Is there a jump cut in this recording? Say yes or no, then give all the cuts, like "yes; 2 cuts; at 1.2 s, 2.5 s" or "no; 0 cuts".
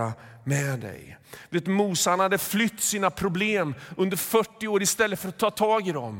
no; 0 cuts